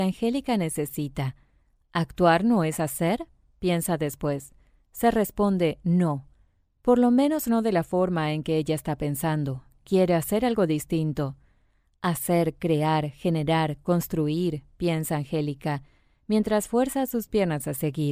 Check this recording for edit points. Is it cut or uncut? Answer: uncut